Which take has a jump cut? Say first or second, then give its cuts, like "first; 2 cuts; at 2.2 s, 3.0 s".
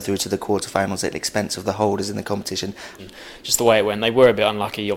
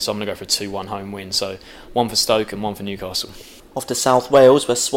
first; 1 cut; at 3.0 s